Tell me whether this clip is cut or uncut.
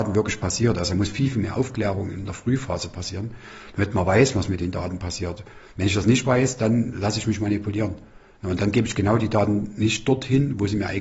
uncut